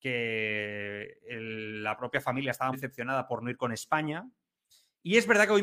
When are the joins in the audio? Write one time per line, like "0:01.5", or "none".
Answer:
0:02.7